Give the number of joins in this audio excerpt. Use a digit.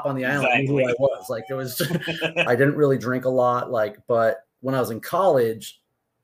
1